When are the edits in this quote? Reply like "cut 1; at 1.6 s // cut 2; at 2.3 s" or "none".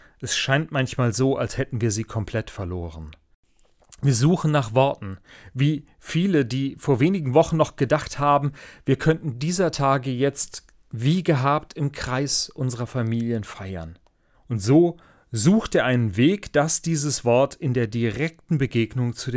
cut 1; at 14.3 s